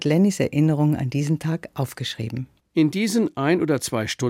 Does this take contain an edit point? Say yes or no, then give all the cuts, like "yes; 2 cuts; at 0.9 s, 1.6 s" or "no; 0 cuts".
yes; 1 cut; at 2.6 s